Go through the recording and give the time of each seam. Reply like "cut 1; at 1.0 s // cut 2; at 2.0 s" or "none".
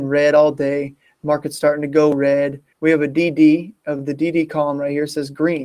cut 1; at 2.7 s